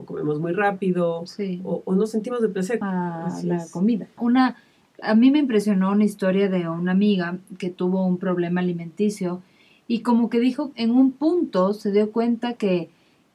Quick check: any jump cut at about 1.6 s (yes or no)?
no